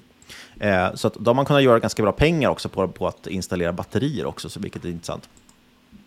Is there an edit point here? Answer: no; 0 cuts

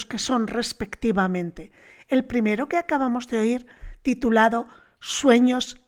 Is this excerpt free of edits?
yes; 0 cuts

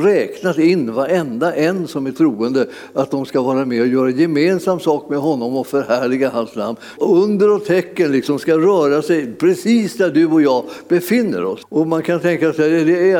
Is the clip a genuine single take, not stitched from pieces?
no; 2 cuts; at 7.0 s, 11.6 s

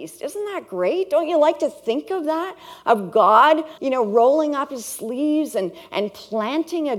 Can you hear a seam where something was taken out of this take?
yes; 1 cut; at 3.8 s

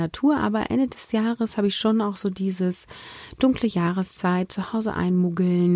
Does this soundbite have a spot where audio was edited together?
no; 0 cuts

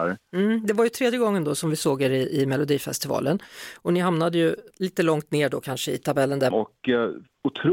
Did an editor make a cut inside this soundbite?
yes; 2 cuts; at 4.7 s, 6.5 s

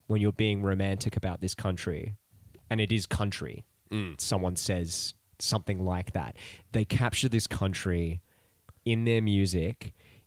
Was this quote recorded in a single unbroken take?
no; 1 cut; at 4.2 s

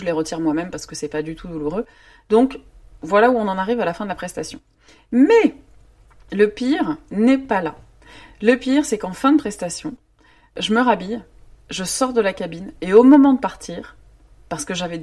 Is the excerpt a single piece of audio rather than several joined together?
yes; 0 cuts

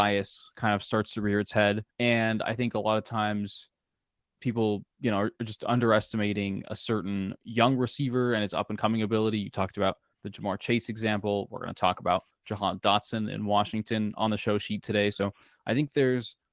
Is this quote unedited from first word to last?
no; 1 cut; at 1.9 s

